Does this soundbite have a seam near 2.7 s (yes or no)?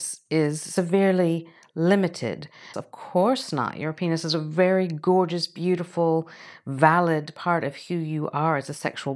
yes